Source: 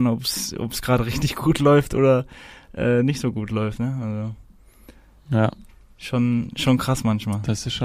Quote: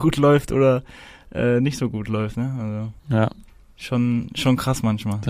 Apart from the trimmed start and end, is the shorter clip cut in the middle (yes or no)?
yes